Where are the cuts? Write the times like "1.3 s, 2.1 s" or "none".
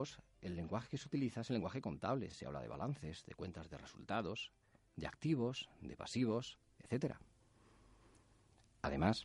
none